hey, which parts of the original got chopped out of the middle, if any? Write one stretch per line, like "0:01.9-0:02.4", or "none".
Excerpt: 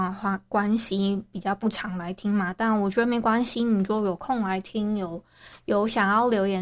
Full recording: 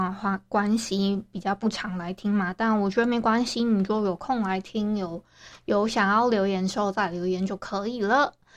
none